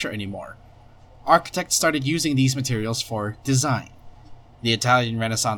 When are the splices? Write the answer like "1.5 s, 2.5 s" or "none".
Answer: 4.5 s